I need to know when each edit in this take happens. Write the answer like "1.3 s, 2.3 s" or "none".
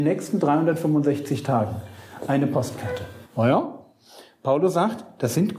3.2 s